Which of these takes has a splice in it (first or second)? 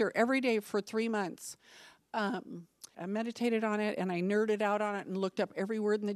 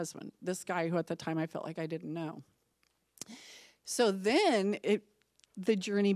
first